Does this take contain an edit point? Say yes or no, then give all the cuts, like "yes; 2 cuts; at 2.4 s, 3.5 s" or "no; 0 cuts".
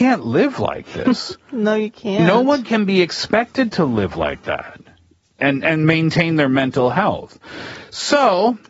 no; 0 cuts